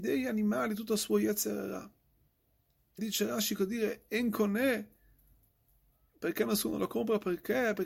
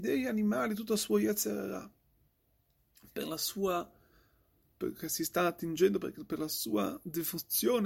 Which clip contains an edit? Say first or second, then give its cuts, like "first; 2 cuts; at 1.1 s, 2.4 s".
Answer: first; 1 cut; at 3.0 s